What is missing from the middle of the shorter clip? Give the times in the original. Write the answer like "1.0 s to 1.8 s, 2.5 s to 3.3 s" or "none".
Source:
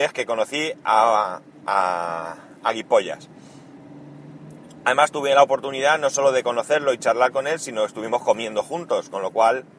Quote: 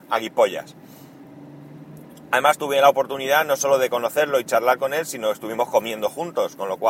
none